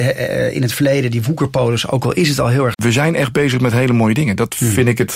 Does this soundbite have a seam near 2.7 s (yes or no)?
yes